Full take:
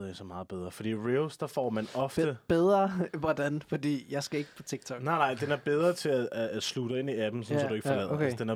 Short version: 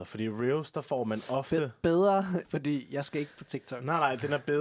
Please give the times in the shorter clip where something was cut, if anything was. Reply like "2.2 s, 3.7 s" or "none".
2.4 s